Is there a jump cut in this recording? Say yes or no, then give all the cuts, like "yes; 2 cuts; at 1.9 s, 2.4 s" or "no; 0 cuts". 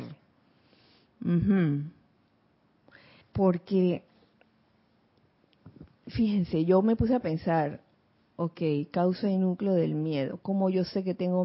yes; 1 cut; at 3.2 s